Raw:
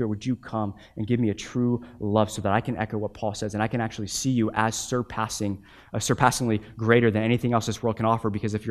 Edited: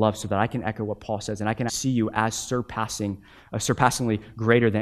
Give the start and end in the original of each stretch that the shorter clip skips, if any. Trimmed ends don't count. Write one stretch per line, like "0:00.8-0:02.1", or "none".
0:03.8-0:04.1